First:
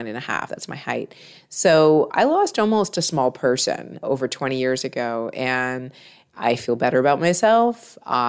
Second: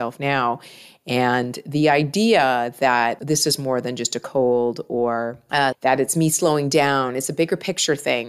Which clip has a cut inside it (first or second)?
second